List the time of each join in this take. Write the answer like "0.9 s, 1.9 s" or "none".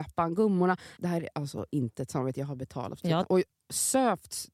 1.0 s, 3.2 s